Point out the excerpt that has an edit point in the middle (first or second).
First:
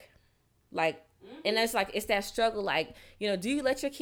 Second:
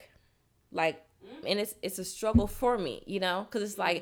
second